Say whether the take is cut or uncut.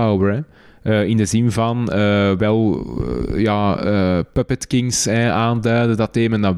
uncut